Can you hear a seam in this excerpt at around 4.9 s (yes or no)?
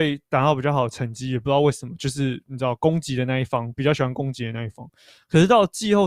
no